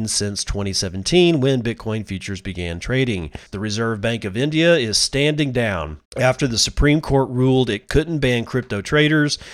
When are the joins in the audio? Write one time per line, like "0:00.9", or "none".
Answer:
0:03.5
0:06.1